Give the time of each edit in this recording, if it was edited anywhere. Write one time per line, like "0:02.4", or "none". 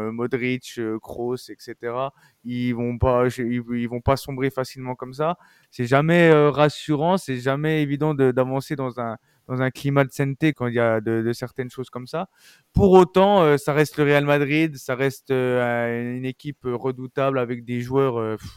0:05.6
0:10.5